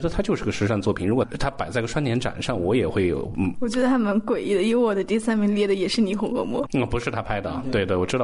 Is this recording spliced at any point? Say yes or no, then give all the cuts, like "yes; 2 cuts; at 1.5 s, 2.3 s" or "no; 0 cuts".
yes; 2 cuts; at 3.5 s, 6.7 s